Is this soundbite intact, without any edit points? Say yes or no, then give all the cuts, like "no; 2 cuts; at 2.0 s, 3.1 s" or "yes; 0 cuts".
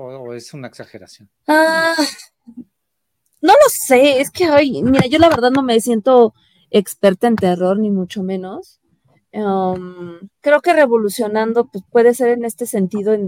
no; 2 cuts; at 1.4 s, 10.3 s